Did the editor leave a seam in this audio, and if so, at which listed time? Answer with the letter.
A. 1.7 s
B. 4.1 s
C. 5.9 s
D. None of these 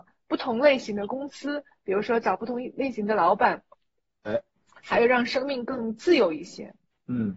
D